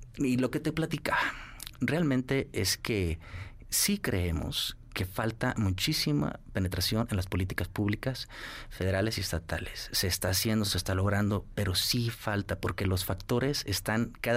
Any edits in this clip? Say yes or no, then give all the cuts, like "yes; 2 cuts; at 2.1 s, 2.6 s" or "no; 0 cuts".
no; 0 cuts